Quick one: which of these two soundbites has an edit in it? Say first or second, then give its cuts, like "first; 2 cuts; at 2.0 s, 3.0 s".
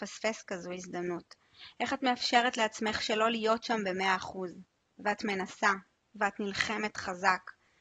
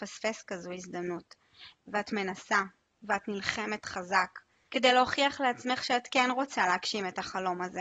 second; 2 cuts; at 1.7 s, 4.7 s